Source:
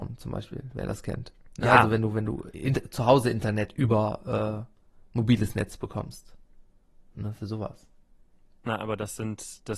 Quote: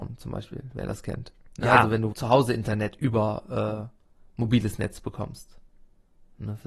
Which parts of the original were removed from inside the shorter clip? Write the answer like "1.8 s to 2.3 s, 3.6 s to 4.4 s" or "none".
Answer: 2.1 s to 2.9 s